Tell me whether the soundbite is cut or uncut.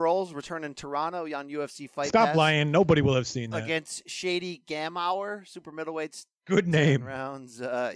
uncut